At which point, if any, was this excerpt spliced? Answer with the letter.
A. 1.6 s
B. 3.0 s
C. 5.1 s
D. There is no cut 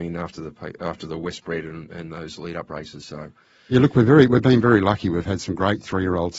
D